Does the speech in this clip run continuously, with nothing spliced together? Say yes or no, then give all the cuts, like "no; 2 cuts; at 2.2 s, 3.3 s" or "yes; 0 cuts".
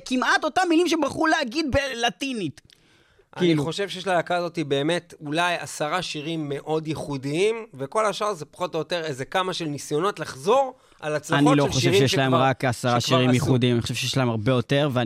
yes; 0 cuts